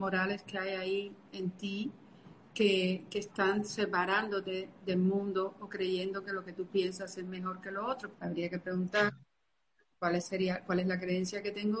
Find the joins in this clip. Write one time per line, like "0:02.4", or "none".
0:08.1